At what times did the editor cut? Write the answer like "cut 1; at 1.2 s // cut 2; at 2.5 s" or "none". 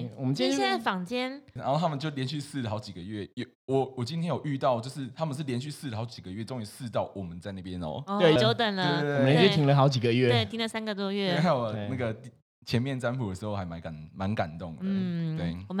cut 1; at 1.6 s // cut 2; at 8.4 s